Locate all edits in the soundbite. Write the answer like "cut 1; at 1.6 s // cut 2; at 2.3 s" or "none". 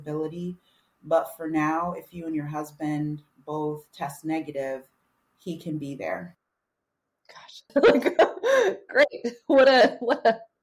cut 1; at 7.7 s